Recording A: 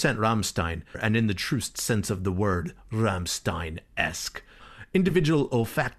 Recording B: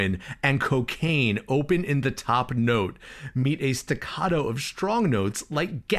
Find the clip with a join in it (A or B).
A